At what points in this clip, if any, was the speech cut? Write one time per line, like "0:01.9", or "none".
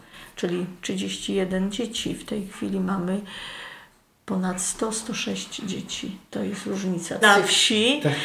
0:07.2